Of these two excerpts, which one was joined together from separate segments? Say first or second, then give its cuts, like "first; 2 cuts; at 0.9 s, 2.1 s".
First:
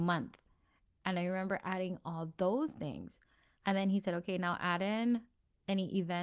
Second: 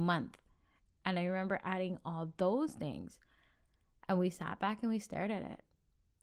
first; 1 cut; at 3.6 s